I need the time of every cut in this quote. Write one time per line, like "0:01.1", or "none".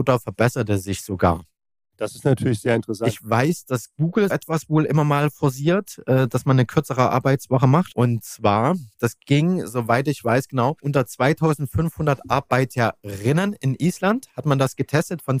0:04.3
0:07.9